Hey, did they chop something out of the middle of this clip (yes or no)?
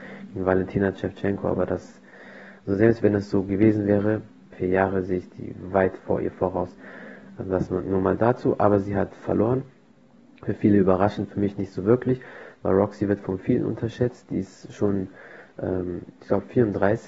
yes